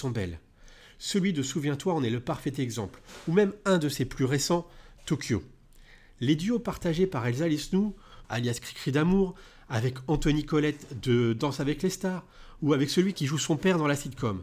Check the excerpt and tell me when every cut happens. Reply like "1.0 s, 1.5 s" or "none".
8.2 s

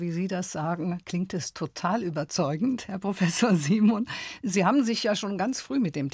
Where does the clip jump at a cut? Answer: none

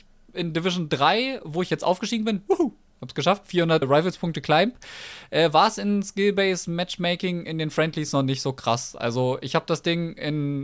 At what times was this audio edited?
3.8 s

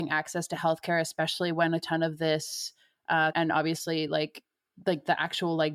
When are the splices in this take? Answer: 3.3 s

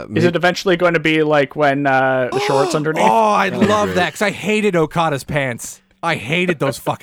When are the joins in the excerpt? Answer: 2.3 s

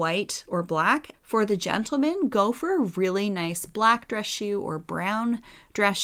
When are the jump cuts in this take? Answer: 1.1 s

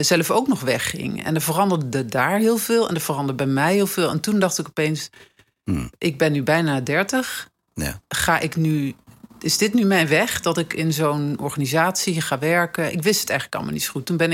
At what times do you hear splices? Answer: none

